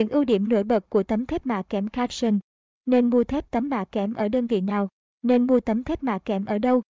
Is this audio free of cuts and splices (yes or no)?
yes